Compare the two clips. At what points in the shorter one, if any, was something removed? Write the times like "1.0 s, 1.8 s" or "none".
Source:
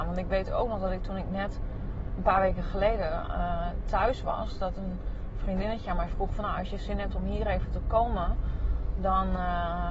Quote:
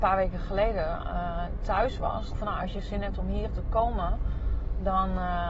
2.3 s, 3.5 s